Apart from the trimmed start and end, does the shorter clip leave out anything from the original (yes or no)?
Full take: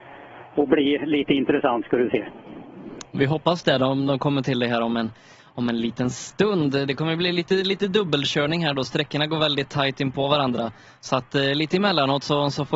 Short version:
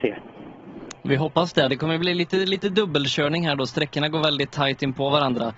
yes